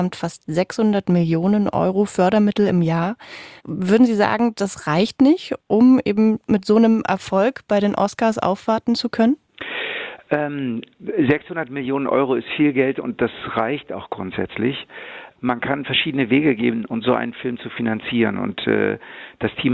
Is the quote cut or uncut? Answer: cut